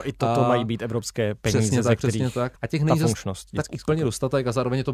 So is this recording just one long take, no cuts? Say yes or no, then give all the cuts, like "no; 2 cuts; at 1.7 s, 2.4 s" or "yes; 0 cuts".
no; 1 cut; at 2.6 s